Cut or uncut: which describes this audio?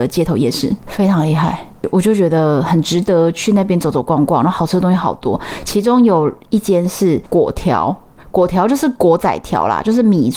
uncut